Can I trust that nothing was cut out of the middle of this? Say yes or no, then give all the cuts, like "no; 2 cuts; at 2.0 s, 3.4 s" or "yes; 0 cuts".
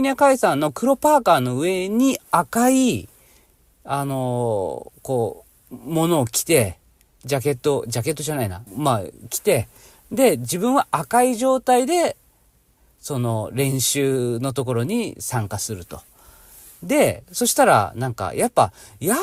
no; 1 cut; at 8.7 s